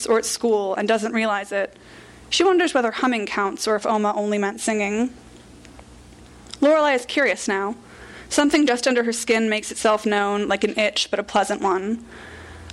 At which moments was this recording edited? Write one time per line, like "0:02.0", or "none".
none